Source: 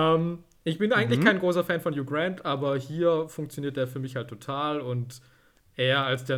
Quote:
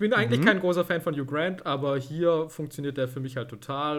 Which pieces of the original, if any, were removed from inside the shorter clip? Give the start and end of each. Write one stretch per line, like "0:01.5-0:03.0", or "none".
none